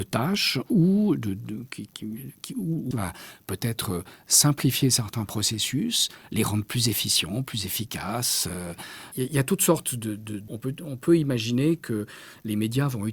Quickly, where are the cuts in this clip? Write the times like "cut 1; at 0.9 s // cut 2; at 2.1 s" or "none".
cut 1; at 2.9 s // cut 2; at 10.5 s